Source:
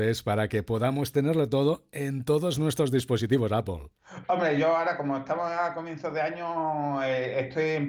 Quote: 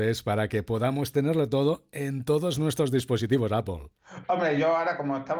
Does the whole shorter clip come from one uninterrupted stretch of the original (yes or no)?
yes